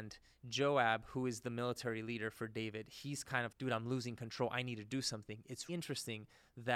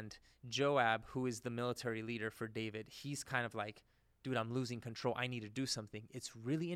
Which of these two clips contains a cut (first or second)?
first